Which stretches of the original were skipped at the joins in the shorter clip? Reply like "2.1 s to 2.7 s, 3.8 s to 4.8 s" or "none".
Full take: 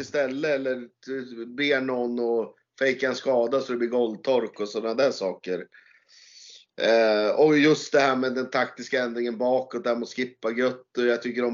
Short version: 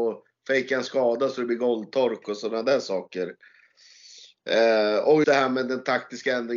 7.6 s to 7.9 s